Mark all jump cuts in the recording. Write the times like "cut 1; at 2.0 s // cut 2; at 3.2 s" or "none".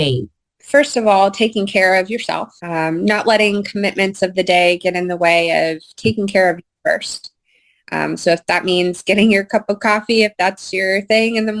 cut 1; at 2.6 s